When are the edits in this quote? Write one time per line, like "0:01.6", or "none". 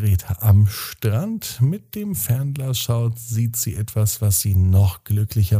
none